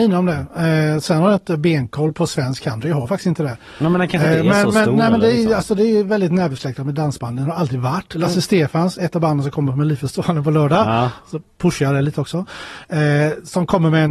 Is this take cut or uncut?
uncut